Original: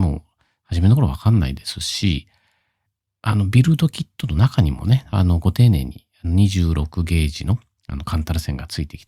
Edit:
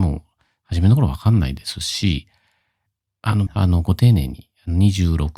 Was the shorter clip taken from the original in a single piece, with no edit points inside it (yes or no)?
no